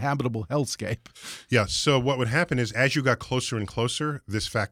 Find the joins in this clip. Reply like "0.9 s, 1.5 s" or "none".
none